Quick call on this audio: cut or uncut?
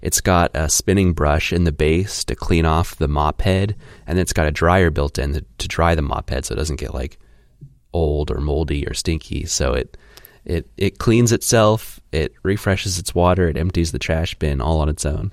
uncut